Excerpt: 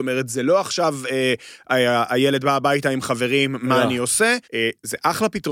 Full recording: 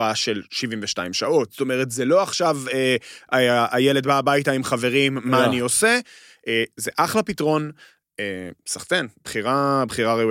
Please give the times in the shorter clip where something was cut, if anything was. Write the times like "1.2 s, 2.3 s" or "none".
4.4 s